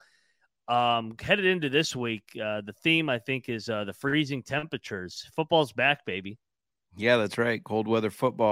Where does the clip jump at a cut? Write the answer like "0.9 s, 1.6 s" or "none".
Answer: none